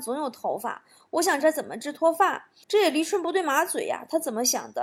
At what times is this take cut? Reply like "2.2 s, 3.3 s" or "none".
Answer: 1.4 s, 2.6 s